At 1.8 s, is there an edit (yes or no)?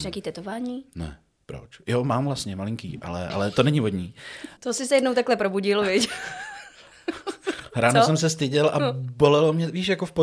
no